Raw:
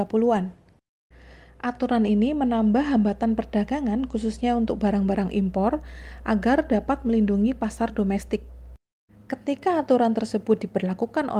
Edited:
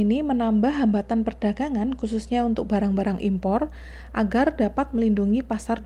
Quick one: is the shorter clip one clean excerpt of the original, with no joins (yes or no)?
yes